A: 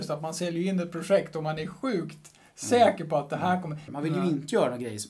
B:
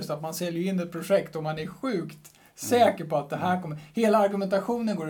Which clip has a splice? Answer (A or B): A